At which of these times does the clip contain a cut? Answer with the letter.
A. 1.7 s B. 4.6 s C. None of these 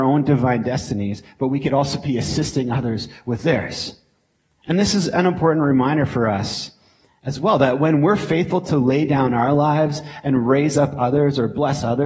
B